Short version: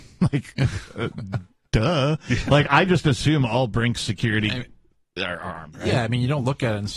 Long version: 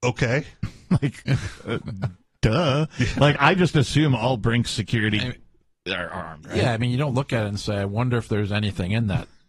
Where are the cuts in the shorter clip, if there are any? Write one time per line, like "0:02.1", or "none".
none